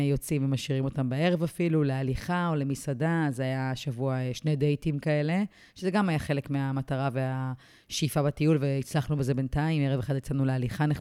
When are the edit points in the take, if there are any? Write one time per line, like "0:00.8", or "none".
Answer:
none